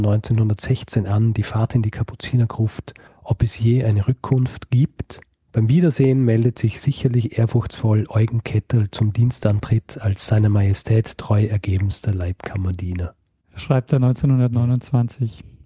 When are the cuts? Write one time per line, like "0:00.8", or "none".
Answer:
0:03.1